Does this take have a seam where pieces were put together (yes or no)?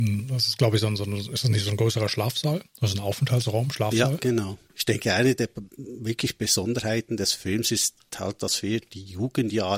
yes